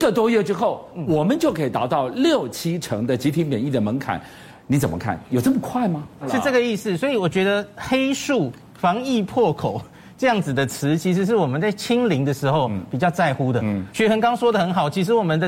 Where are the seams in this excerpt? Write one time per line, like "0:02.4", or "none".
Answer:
0:06.2